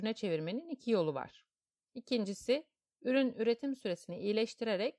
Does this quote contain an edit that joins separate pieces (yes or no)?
yes